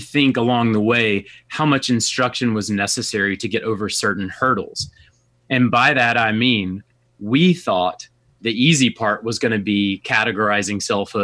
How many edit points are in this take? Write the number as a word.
zero